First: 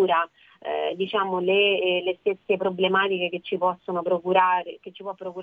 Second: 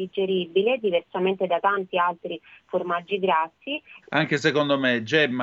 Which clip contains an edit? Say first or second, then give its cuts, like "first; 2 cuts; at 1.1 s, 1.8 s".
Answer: second; 1 cut; at 4.0 s